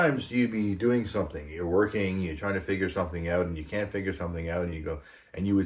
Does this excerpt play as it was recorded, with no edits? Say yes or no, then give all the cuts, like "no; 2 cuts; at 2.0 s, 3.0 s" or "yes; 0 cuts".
yes; 0 cuts